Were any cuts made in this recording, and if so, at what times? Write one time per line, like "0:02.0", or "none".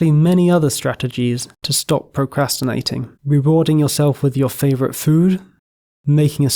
0:03.2